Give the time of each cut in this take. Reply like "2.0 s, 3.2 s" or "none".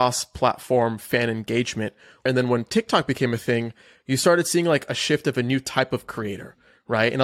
2.3 s